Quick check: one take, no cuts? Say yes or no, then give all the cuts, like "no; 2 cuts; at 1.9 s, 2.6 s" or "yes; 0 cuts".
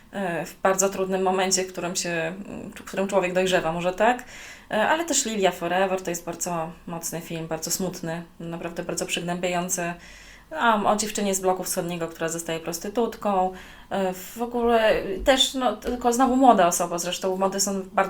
yes; 0 cuts